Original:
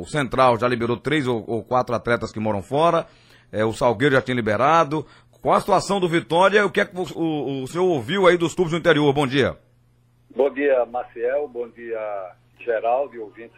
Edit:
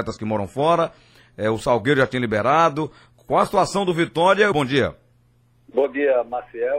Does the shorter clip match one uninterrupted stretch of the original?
no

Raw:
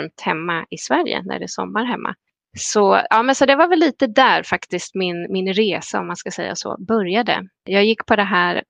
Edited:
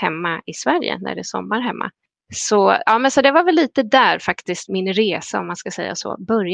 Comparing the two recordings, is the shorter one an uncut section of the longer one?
no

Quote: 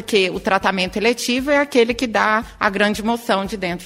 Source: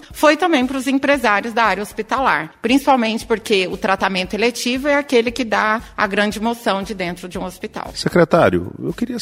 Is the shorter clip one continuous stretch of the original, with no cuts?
yes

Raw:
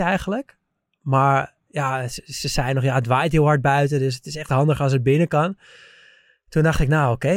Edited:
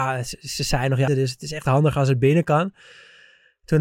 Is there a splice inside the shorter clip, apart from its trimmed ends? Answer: yes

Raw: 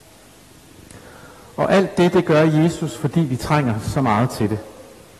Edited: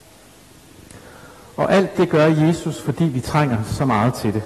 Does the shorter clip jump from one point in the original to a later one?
yes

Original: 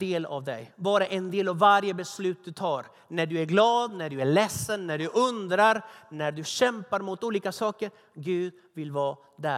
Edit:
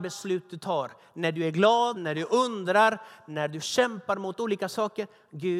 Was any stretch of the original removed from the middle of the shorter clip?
yes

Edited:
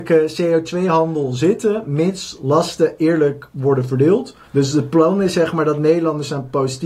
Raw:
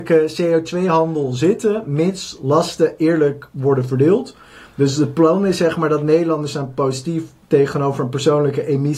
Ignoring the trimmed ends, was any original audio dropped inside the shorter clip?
yes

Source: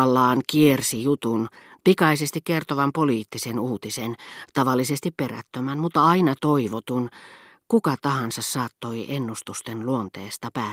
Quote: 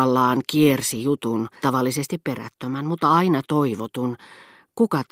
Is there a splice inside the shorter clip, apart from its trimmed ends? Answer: yes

